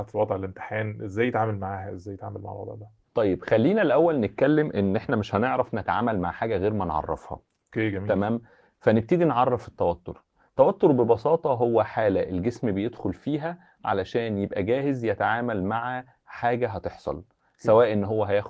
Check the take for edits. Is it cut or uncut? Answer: uncut